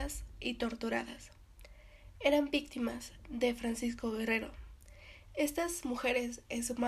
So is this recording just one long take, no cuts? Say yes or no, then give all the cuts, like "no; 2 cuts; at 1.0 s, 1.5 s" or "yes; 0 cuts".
yes; 0 cuts